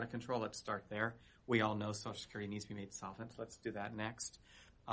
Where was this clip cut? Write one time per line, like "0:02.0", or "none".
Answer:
none